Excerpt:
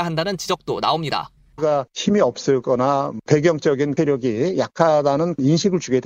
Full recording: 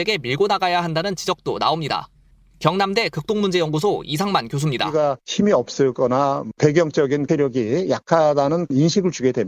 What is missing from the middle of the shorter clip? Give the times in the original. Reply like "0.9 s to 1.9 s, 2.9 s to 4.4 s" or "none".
2.4 s to 4.9 s